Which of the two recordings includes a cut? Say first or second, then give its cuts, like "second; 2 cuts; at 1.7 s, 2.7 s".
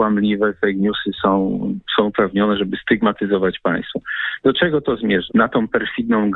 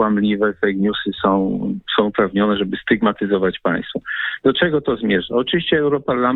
first; 1 cut; at 5.3 s